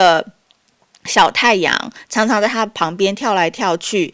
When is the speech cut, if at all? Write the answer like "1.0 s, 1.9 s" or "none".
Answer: 2.0 s